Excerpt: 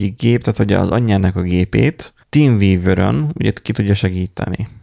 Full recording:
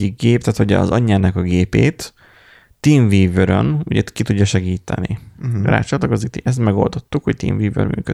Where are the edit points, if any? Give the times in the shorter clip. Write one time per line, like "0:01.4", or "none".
0:02.2